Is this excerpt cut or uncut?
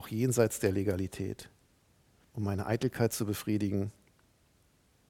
cut